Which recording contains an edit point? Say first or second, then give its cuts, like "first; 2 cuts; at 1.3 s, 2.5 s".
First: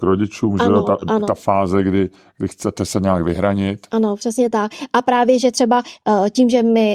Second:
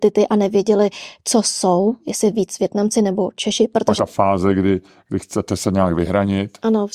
second; 1 cut; at 4.0 s